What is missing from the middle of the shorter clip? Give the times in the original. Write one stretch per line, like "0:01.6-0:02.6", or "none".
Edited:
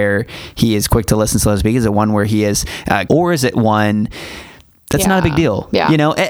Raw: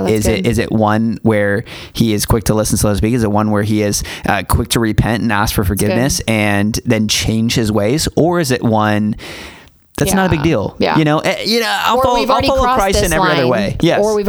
0:04.5-0:08.1